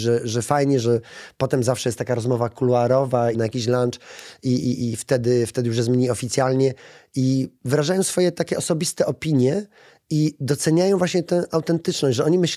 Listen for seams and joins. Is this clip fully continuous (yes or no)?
no